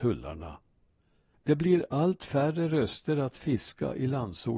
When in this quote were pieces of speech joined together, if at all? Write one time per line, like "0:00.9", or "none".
none